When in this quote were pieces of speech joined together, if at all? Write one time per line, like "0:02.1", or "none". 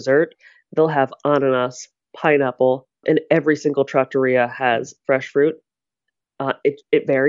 0:03.0